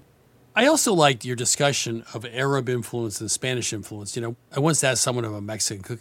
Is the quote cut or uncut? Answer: uncut